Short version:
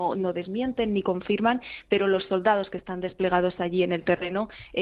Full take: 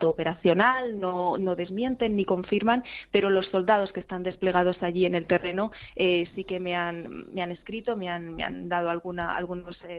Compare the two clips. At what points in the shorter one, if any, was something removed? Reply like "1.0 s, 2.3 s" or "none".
none

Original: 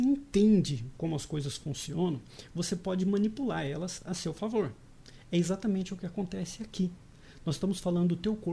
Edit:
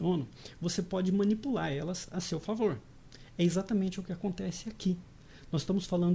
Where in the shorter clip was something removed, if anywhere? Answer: none

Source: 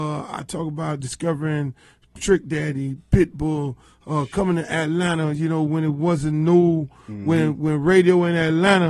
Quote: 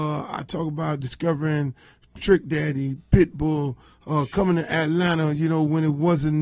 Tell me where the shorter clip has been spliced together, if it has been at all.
none

